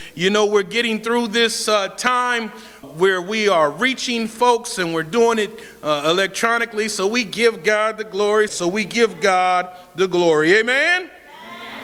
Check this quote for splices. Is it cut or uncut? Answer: cut